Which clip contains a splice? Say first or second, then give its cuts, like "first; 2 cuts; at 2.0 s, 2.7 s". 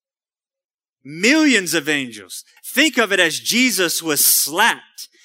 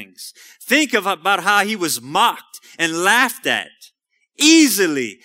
first; 1 cut; at 2.6 s